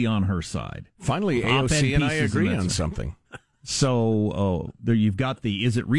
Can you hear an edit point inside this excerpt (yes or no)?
yes